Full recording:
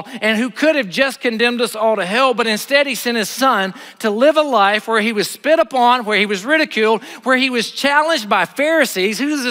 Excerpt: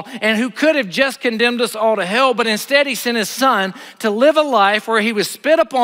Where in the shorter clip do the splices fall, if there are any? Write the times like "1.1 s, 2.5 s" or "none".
none